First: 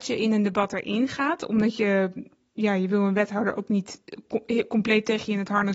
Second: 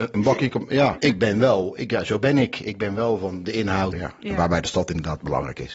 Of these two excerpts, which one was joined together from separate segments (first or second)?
second